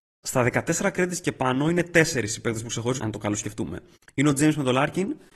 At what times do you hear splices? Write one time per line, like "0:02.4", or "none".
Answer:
0:03.0